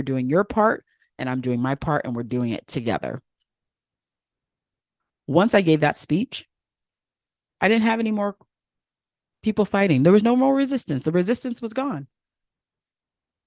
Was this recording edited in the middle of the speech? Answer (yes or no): no